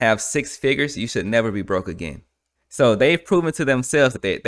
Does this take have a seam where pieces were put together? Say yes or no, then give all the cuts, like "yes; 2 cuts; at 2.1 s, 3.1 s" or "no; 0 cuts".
yes; 1 cut; at 2.5 s